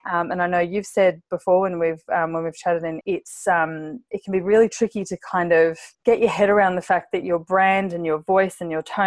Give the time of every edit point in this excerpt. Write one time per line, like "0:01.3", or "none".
0:03.0
0:05.9